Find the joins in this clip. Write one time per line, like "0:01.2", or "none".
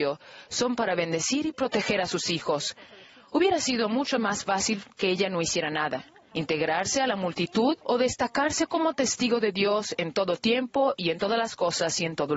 0:06.3
0:07.8

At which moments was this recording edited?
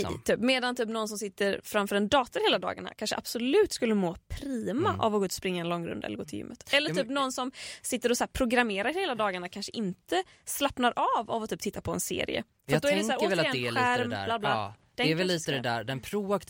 none

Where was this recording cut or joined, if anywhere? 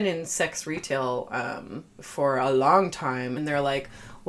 0:01.9
0:03.4

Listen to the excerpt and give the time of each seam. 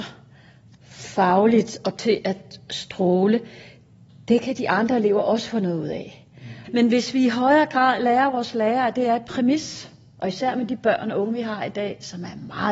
0:06.7

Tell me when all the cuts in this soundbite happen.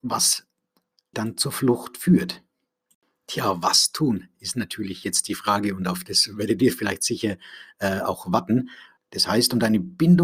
0:01.1
0:09.0

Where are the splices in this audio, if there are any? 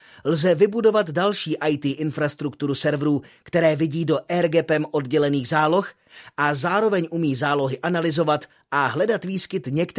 none

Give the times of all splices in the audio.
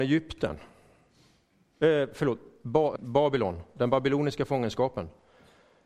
0:03.0

